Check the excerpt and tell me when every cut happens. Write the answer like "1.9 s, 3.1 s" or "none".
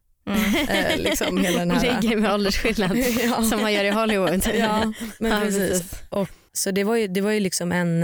6.5 s